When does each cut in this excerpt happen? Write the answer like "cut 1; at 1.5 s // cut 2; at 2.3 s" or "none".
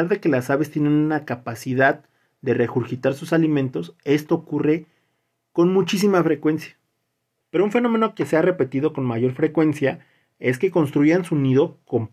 cut 1; at 7.4 s